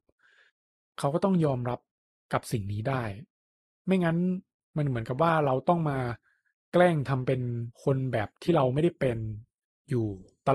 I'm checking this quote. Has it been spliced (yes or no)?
yes